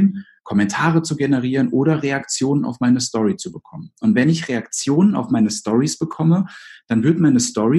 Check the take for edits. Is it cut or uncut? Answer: uncut